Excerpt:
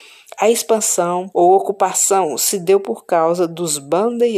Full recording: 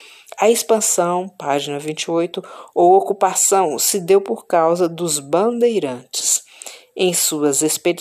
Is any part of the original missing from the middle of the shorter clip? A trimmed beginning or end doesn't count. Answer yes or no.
yes